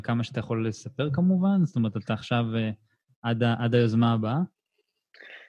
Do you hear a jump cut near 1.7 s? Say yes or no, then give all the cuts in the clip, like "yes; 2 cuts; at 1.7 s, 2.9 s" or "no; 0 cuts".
no; 0 cuts